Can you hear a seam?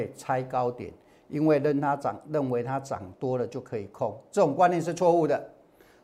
no; 0 cuts

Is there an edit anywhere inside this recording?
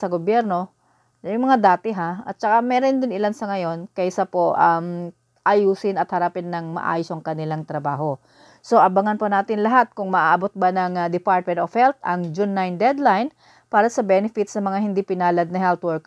no; 0 cuts

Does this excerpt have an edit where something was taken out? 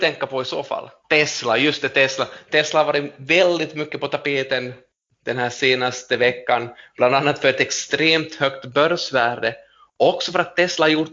yes; 1 cut; at 1.0 s

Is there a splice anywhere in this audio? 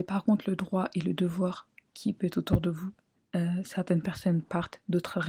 yes; 2 cuts; at 1.9 s, 3.1 s

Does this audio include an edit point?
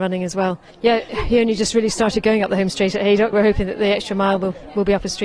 yes; 1 cut; at 3.3 s

